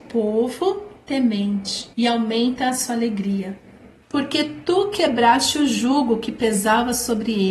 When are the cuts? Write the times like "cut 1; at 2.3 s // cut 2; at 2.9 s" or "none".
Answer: cut 1; at 1.9 s // cut 2; at 4.0 s